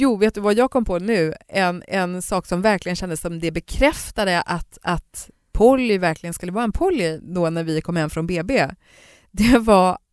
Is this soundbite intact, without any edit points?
yes; 0 cuts

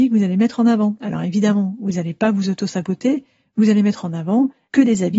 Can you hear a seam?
no; 0 cuts

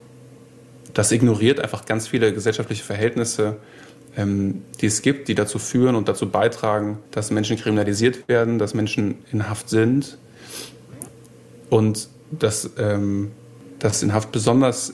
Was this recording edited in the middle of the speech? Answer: yes; 1 cut; at 7.1 s

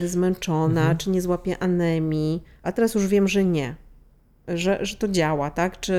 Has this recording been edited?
no; 0 cuts

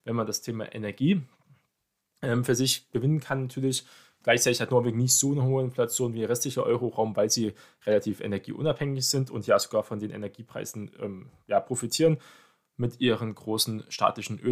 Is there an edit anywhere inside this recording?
no; 0 cuts

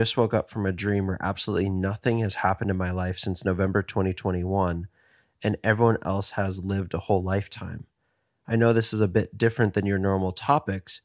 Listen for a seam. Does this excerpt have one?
no; 0 cuts

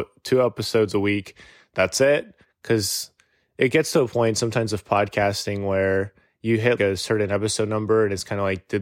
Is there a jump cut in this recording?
yes; 2 cuts; at 2.4 s, 6.8 s

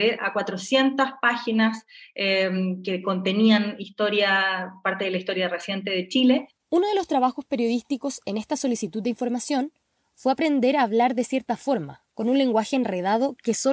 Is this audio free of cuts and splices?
yes; 0 cuts

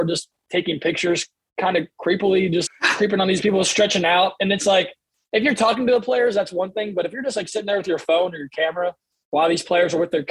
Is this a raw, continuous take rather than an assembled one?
no; 1 cut; at 2.7 s

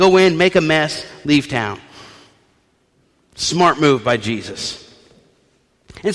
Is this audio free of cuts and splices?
yes; 0 cuts

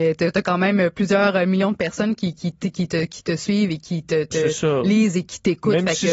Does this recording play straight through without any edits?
yes; 0 cuts

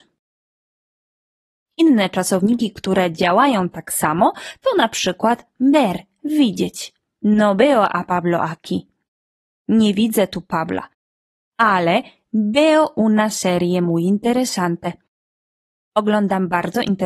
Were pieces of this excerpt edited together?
no; 0 cuts

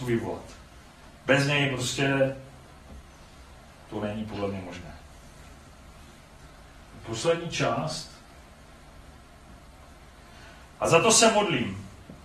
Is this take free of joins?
yes; 0 cuts

